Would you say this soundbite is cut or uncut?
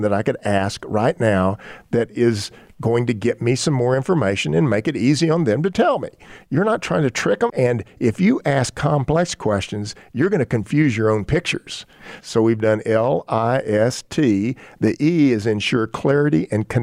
cut